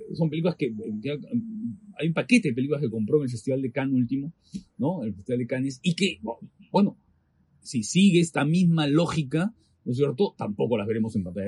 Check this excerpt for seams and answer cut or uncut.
uncut